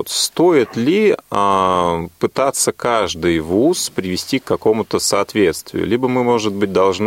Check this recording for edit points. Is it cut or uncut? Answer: uncut